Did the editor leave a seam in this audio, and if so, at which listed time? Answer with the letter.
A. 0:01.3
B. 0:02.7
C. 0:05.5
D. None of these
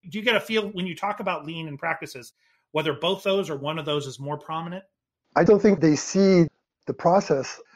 C